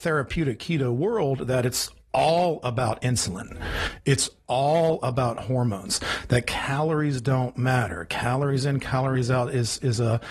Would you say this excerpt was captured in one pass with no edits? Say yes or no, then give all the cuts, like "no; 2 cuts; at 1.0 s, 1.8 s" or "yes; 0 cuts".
yes; 0 cuts